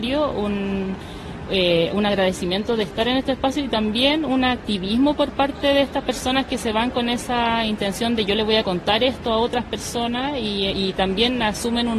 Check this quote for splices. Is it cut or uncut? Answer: cut